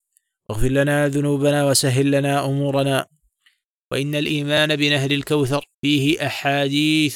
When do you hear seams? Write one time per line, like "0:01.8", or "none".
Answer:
0:05.7

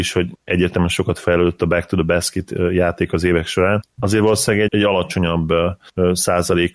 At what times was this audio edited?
0:04.7

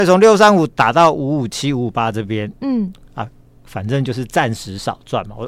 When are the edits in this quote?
none

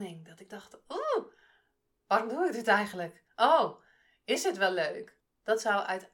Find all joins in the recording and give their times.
0:05.2

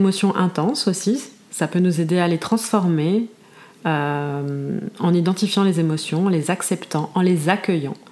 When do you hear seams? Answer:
none

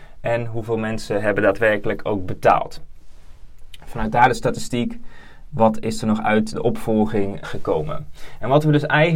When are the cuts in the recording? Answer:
0:07.4

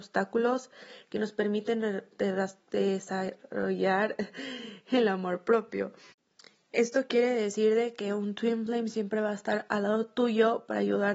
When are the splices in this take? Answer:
none

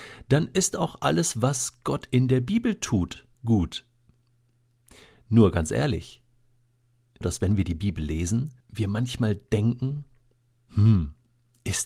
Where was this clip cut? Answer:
0:03.3
0:07.2
0:08.6

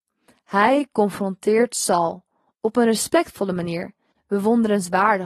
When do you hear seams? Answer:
0:04.1

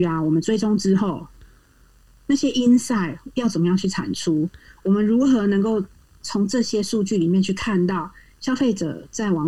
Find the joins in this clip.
none

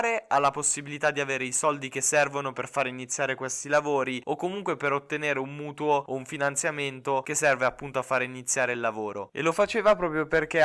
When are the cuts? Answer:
0:09.3

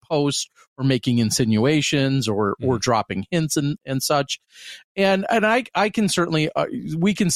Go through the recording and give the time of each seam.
none

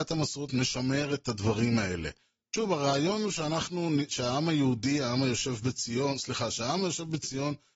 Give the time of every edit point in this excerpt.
none

